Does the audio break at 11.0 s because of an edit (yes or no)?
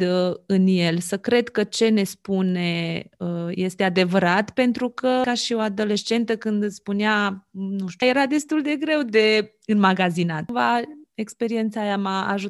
no